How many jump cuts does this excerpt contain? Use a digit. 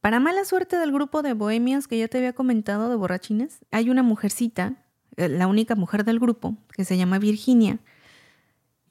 1